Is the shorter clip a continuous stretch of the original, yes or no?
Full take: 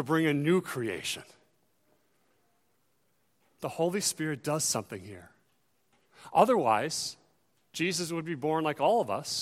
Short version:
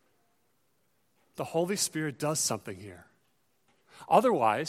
yes